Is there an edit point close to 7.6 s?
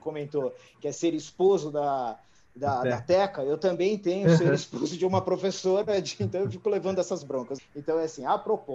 yes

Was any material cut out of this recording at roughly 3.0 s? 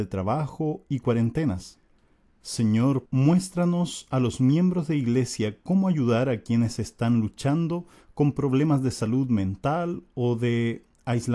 yes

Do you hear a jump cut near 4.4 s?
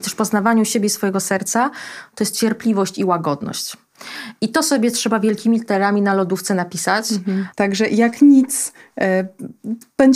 no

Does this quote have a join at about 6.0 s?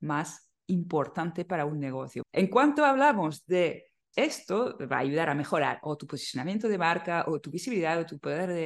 no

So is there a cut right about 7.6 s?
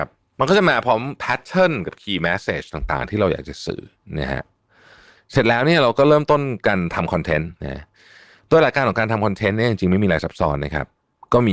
yes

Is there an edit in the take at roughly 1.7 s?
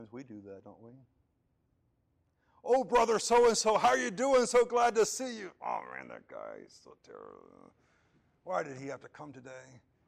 no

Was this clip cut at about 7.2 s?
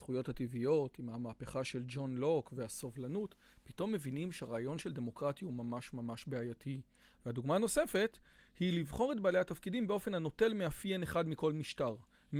yes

